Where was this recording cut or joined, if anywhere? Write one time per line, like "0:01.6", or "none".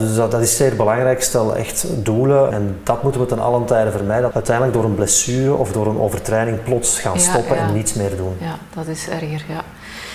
0:02.5
0:04.3